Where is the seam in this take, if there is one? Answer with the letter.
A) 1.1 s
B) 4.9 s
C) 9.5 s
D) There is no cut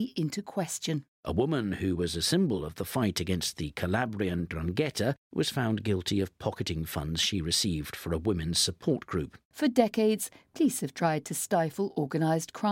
C